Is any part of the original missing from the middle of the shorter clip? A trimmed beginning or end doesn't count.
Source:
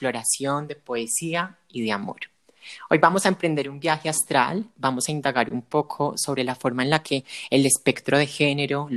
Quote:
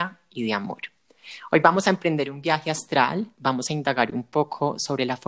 no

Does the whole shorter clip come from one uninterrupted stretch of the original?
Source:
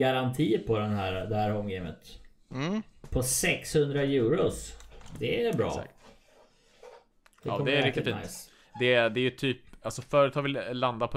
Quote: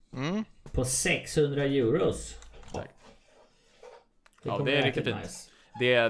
no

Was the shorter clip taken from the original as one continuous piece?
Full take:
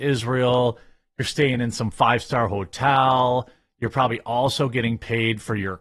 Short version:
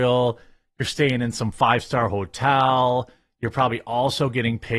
yes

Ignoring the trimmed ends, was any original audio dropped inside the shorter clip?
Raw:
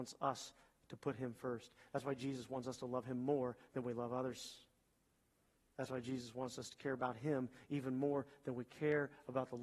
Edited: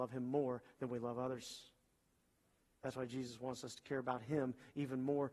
no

